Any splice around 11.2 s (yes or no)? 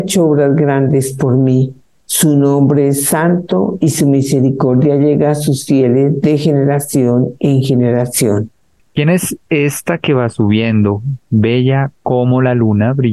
yes